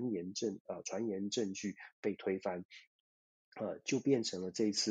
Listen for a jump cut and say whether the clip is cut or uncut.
uncut